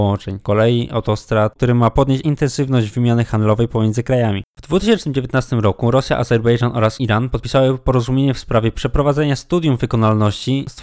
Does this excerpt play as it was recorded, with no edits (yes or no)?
no